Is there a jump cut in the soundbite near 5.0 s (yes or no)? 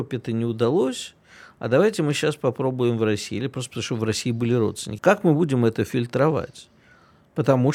yes